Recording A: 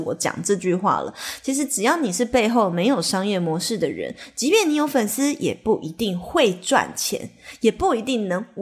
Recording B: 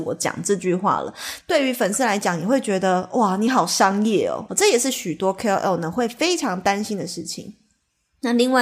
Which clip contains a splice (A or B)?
B